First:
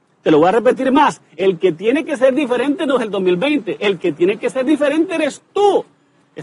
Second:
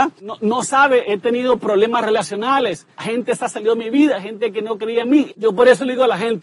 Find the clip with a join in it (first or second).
second